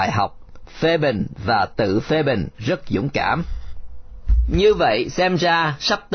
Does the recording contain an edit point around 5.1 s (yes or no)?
no